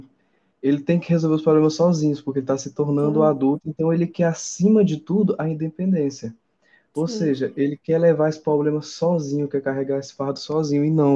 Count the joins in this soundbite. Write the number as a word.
zero